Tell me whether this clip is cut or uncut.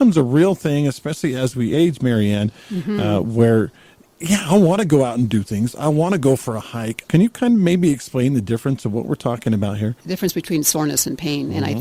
cut